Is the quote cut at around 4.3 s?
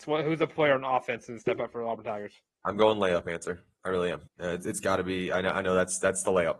yes; 1 cut; at 4.3 s

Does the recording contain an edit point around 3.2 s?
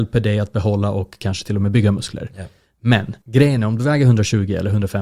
yes; 1 cut; at 3.2 s

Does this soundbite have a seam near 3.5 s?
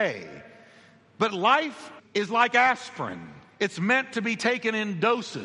no; 1 cut; at 2.0 s

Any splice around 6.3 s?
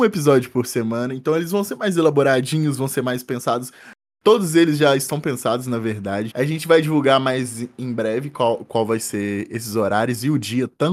yes; 1 cut; at 6.3 s

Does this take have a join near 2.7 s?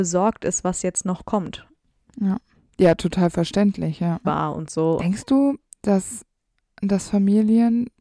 no; 1 cut; at 4.2 s

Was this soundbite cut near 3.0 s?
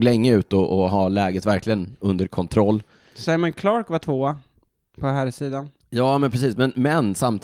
no; 0 cuts

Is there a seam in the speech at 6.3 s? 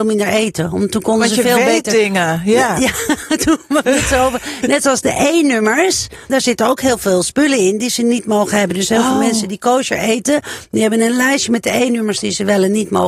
yes; 1 cut; at 6.3 s

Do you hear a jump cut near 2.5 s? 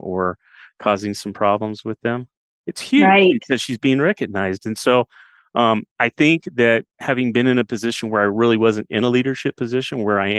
yes; 1 cut; at 2.5 s

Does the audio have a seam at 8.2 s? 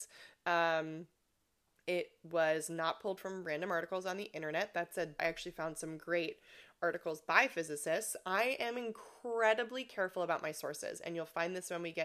no; 1 cut; at 5.2 s

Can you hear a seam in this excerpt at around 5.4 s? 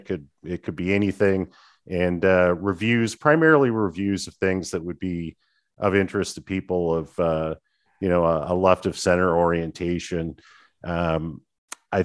no; 0 cuts

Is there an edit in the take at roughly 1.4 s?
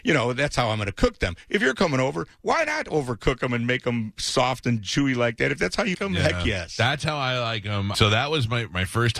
no; 2 cuts; at 5.9 s, 7.9 s

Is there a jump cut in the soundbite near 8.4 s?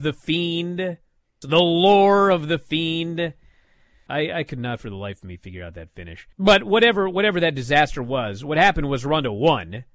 no; 3 cuts; at 1.4 s, 4.1 s, 6.3 s

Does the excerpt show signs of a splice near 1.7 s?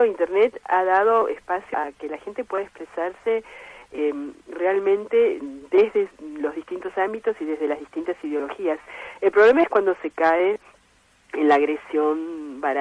yes; 1 cut; at 1.7 s

